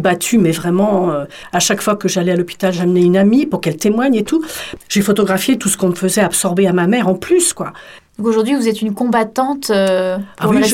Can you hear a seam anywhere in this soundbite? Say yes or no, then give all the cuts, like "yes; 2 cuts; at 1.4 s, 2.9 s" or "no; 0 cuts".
no; 0 cuts